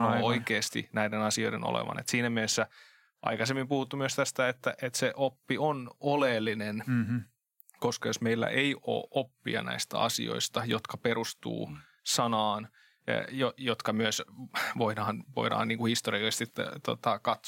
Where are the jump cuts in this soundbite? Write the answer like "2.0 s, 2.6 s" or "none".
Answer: none